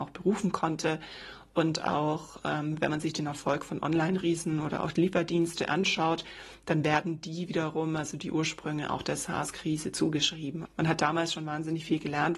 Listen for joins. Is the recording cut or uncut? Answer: cut